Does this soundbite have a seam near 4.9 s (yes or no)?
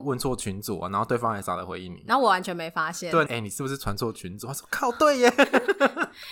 no